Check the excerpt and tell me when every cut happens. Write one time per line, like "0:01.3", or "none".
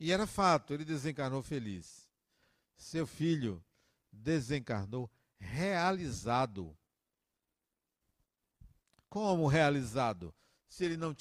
none